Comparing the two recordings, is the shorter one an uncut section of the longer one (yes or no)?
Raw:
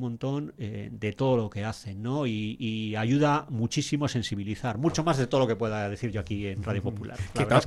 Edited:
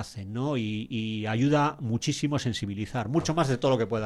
yes